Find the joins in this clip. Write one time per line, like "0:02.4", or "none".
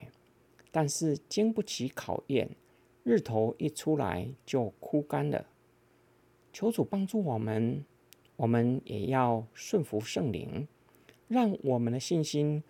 none